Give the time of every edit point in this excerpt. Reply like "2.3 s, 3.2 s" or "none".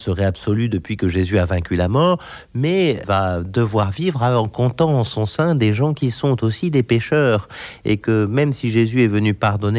none

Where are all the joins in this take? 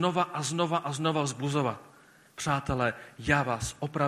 2.3 s

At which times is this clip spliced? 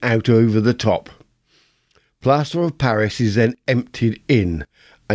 none

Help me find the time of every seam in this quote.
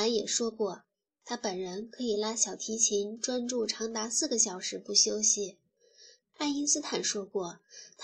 6.2 s

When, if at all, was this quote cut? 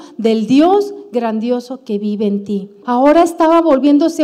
2.8 s

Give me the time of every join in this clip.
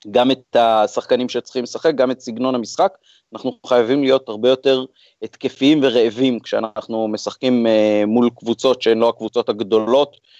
none

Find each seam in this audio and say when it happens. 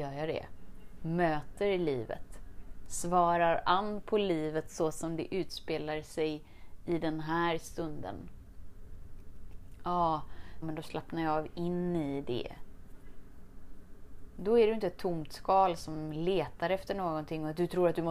10.6 s

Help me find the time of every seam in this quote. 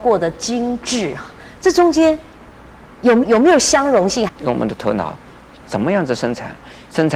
3.2 s, 4.3 s, 5.6 s

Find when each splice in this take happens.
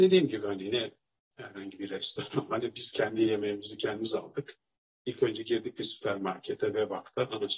none

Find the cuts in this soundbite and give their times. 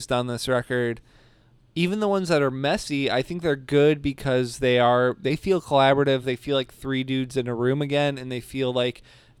none

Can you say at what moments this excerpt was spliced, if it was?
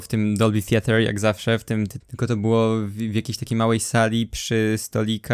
2.0 s

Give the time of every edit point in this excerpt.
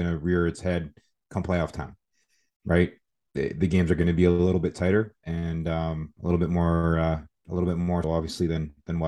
6.2 s, 8.0 s

